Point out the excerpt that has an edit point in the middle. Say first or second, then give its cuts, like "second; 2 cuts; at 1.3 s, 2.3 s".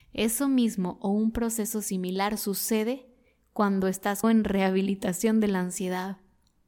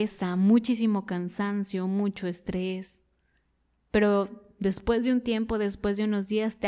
first; 1 cut; at 4.2 s